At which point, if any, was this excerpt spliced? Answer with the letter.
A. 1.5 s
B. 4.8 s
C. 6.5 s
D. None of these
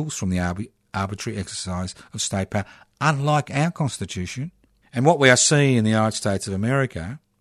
B